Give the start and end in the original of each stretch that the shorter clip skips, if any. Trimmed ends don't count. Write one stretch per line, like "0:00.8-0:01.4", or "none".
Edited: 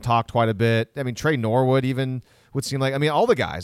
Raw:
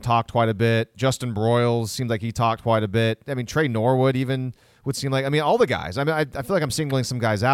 0:00.9-0:03.2